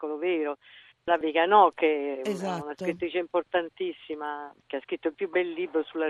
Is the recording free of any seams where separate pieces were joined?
no; 1 cut; at 0.9 s

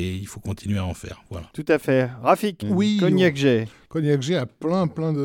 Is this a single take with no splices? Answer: no; 1 cut; at 2.6 s

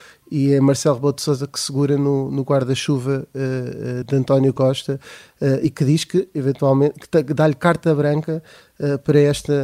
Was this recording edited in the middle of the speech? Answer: no; 0 cuts

